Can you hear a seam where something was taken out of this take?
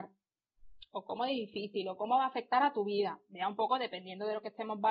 yes; 1 cut; at 0.9 s

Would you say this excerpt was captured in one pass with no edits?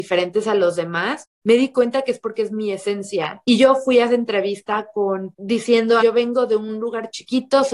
no; 2 cuts; at 3.4 s, 6.0 s

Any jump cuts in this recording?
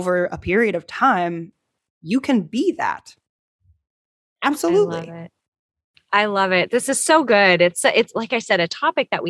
no; 0 cuts

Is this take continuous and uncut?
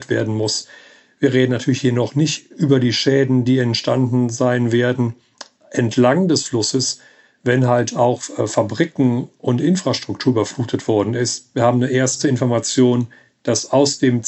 yes; 0 cuts

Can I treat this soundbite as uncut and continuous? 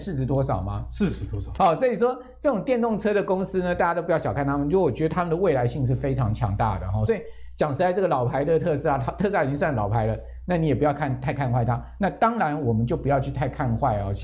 no; 2 cuts; at 1.6 s, 7.1 s

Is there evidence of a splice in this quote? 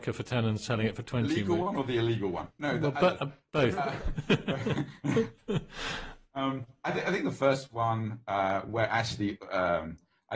no; 0 cuts

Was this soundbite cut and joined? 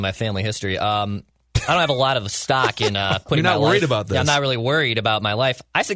no; 0 cuts

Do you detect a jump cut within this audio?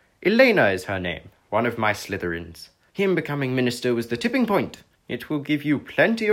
yes; 2 cuts; at 2.9 s, 5.0 s

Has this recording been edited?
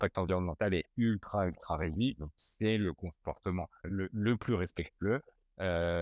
yes; 1 cut; at 3.8 s

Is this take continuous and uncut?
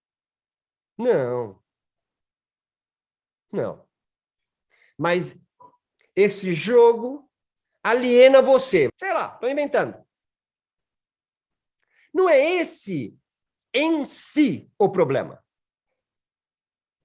no; 1 cut; at 8.9 s

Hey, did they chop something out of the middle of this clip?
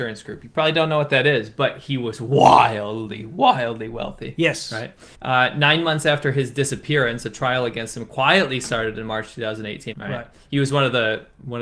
yes; 2 cuts; at 5.1 s, 9.9 s

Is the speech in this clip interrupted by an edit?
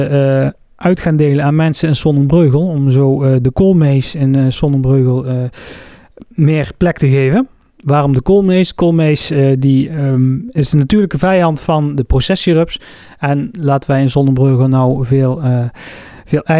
no; 0 cuts

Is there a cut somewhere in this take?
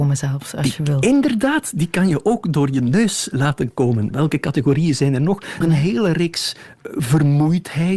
yes; 3 cuts; at 4.1 s, 5.6 s, 6.8 s

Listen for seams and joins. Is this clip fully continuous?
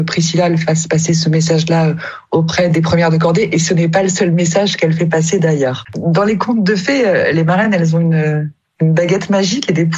yes; 0 cuts

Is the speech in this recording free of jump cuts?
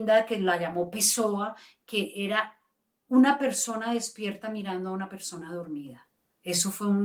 yes; 0 cuts

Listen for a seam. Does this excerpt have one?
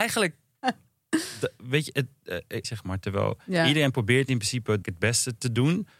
yes; 2 cuts; at 2.6 s, 4.8 s

